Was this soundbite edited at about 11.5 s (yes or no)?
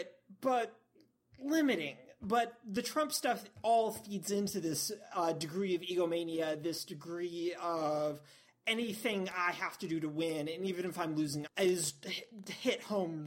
yes